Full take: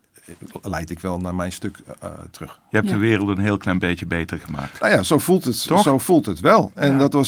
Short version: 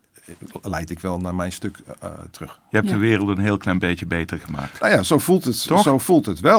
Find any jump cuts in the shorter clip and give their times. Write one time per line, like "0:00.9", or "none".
none